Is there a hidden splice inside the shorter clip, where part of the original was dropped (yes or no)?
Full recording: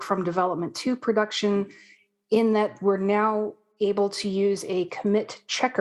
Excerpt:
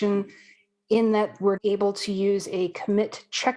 yes